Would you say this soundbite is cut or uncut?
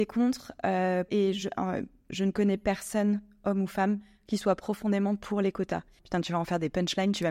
cut